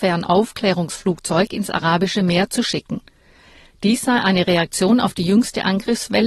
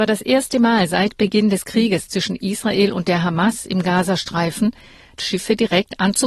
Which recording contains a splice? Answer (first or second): second